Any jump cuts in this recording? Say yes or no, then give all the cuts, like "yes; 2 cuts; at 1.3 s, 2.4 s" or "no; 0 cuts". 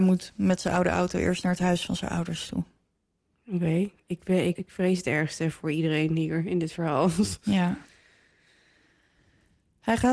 yes; 1 cut; at 4.6 s